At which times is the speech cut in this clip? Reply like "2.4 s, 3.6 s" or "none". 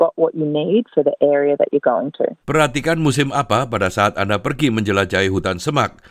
2.4 s

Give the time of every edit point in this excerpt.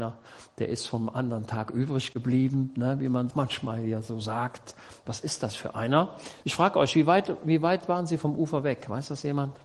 3.3 s, 6.4 s

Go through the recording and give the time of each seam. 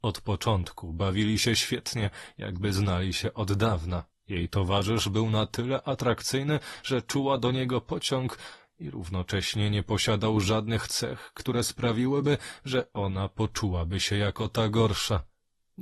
4.1 s

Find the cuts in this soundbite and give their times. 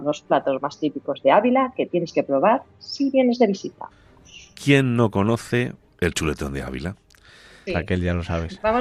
7.7 s

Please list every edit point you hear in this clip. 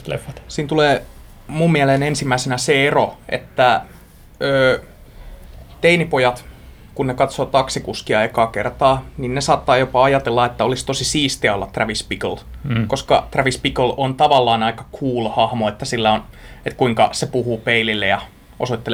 none

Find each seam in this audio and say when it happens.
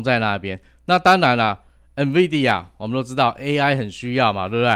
none

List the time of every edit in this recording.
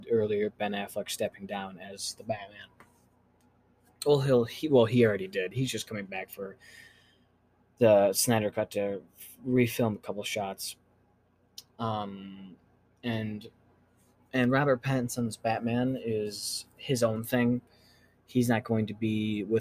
none

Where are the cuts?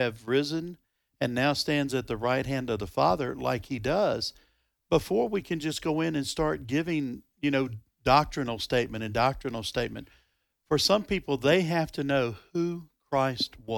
none

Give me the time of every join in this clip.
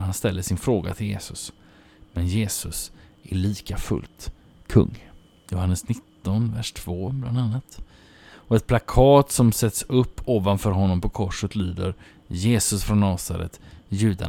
5.5 s

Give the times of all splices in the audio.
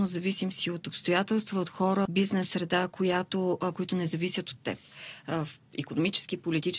2.1 s, 3.7 s

